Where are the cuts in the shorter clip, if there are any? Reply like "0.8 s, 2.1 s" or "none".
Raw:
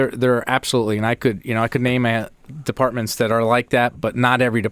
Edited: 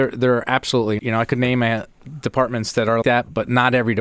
1.0 s, 3.0 s